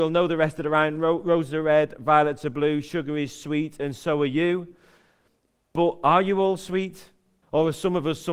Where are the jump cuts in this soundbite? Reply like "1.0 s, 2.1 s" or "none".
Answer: 7.4 s